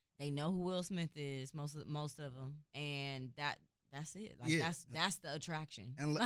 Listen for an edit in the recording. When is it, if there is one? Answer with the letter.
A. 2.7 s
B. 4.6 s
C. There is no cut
A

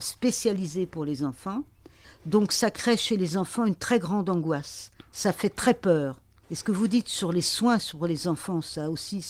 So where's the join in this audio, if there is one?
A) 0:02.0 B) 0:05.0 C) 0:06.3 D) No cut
A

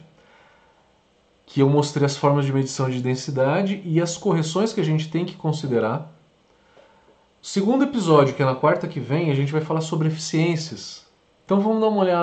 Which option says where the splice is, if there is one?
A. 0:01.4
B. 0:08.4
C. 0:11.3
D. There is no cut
C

